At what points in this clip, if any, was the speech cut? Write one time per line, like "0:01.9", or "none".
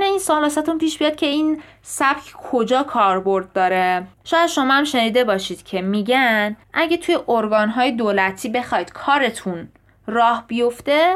0:04.1
0:06.6